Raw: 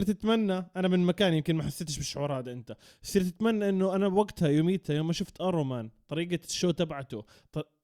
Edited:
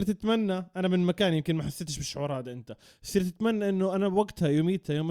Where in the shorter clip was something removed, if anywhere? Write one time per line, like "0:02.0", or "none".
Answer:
none